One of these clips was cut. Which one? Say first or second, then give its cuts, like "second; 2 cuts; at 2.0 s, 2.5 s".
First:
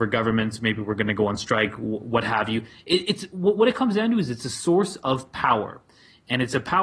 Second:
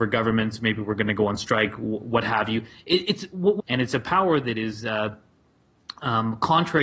second; 1 cut; at 3.6 s